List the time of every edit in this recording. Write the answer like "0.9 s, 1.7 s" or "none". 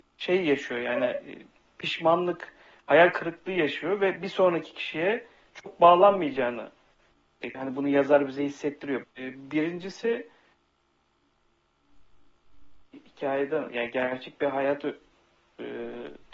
7.5 s, 9.0 s